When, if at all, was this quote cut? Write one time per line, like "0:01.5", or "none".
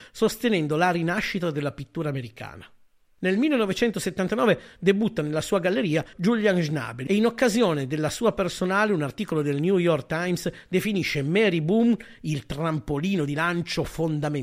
0:06.1